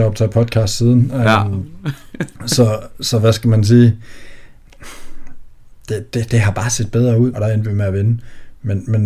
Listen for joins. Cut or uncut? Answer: cut